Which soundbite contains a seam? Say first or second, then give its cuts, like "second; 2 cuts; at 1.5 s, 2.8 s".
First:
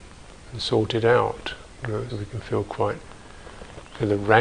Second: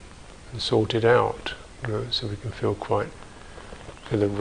first; 1 cut; at 2.1 s